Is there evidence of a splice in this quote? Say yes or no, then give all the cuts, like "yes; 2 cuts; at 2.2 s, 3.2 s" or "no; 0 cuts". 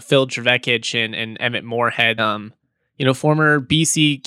yes; 1 cut; at 2.2 s